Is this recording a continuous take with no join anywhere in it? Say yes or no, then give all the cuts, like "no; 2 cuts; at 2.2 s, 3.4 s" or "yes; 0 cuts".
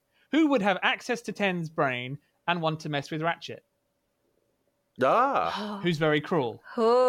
yes; 0 cuts